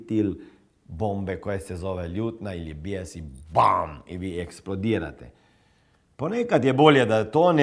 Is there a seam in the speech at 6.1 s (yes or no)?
no